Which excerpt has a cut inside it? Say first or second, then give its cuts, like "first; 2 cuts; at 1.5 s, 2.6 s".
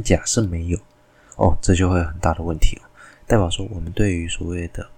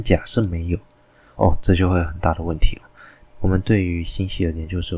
second; 1 cut; at 3.3 s